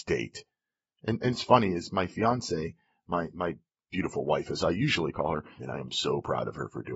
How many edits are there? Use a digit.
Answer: 1